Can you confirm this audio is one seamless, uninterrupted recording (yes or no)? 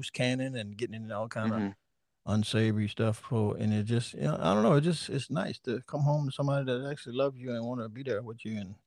yes